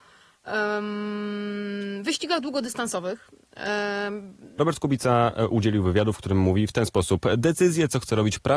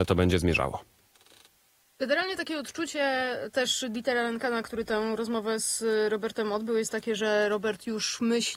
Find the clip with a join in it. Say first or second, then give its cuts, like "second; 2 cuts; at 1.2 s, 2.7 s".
first; 1 cut; at 4.6 s